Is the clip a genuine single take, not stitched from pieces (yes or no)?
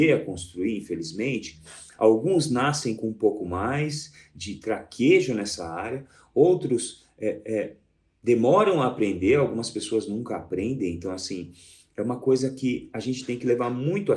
yes